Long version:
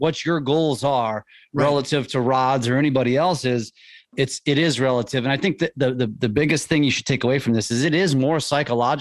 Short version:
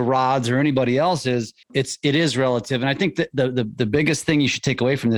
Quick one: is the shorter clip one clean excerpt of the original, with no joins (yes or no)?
no